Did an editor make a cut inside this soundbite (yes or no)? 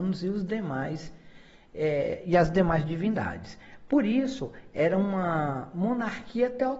no